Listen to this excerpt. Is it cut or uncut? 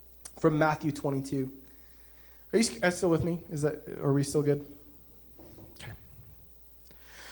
uncut